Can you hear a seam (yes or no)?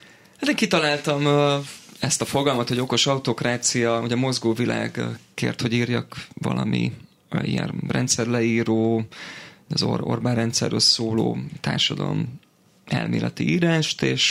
no